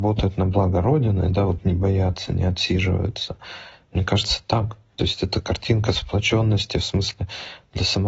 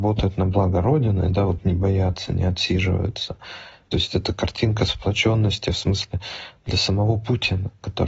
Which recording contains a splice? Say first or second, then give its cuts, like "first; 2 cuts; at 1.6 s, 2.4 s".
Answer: second; 1 cut; at 3.8 s